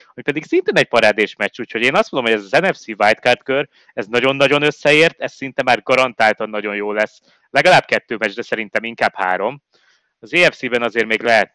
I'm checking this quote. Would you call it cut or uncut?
uncut